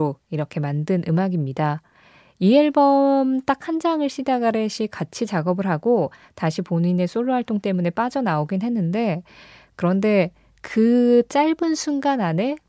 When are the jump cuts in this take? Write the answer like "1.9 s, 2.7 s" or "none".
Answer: none